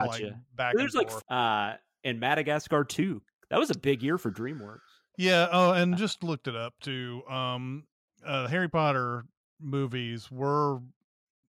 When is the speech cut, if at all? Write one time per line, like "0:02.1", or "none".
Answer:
0:01.2
0:06.0